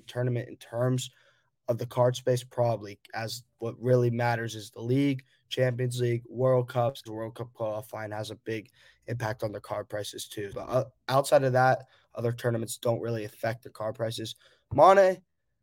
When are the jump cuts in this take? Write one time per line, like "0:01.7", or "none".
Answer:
0:07.1
0:10.5